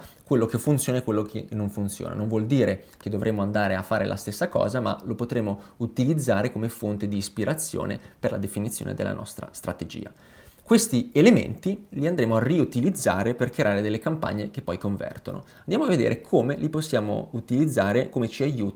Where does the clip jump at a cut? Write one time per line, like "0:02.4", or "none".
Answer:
none